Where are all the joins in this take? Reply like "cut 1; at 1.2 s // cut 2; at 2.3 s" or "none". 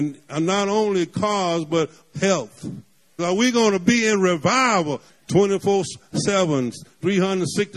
cut 1; at 3.2 s // cut 2; at 5.1 s